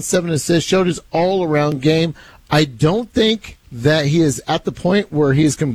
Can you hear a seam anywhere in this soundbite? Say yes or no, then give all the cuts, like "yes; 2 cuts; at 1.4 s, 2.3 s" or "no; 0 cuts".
yes; 1 cut; at 3.6 s